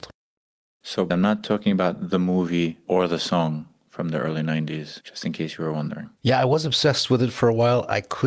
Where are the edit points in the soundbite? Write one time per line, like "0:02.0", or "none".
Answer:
none